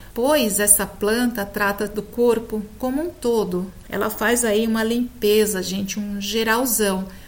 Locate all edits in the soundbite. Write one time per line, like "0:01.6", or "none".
0:03.8